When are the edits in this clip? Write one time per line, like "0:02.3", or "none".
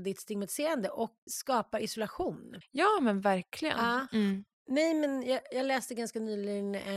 0:01.3
0:04.1

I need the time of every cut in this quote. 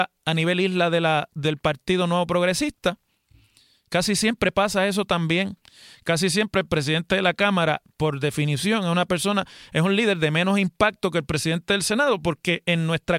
none

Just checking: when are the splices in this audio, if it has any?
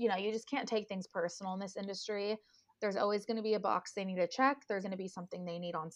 0:04.8

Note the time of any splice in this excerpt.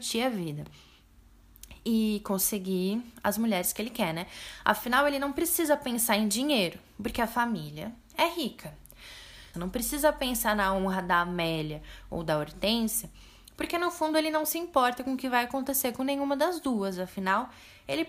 0:09.5

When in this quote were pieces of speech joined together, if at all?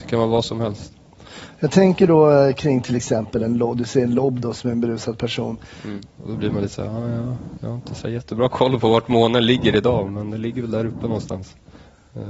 0:06.1

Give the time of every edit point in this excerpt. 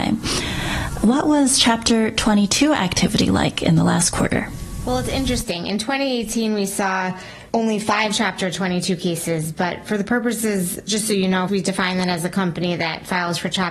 0:07.5
0:11.5

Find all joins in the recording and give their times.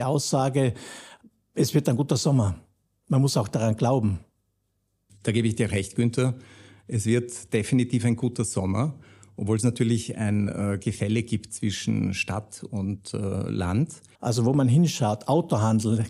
0:14.1

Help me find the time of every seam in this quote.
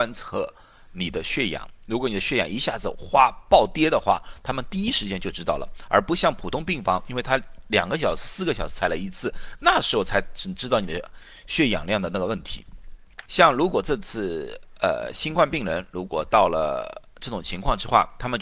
0:13.3

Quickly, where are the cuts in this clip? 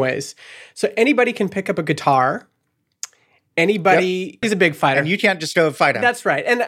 0:04.4

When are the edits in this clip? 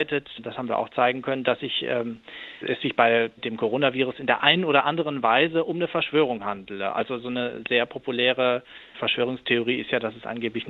0:02.6

